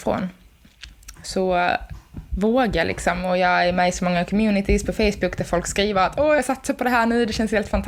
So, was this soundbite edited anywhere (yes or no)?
yes